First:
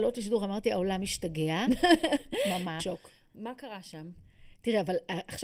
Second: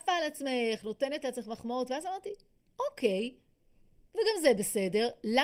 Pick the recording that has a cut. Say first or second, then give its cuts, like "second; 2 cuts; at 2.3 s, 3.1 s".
first; 1 cut; at 2.8 s